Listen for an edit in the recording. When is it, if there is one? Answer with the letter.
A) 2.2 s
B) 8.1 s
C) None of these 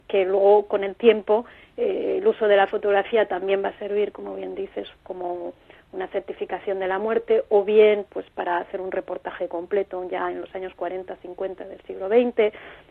C